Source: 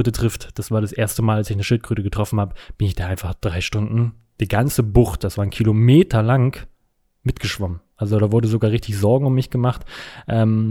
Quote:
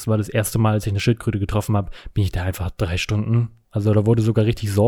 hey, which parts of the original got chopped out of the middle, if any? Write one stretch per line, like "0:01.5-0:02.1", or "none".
0:04.3-0:07.9

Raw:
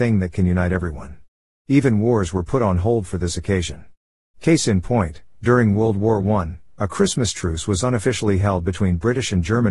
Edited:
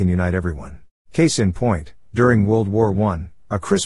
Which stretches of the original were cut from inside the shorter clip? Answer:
0:01.4-0:04.3

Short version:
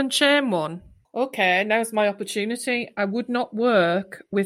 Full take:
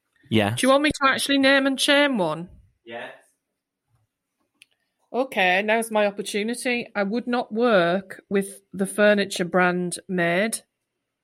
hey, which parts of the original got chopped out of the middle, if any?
0:02.7-0:05.0

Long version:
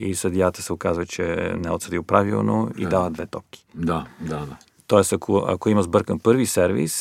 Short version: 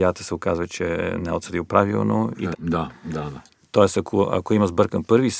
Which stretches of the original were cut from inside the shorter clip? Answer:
0:02.9-0:03.7

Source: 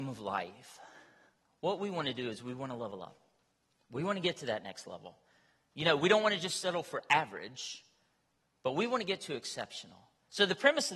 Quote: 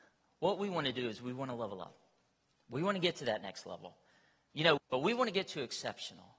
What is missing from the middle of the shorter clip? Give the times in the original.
0:06.0-0:08.5

